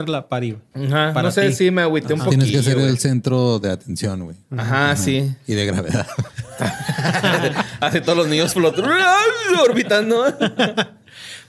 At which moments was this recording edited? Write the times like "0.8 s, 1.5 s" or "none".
none